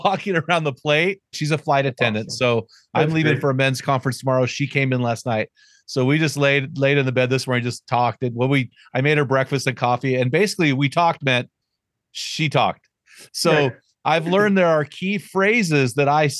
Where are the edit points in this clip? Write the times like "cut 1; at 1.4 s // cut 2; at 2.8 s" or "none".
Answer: cut 1; at 1.3 s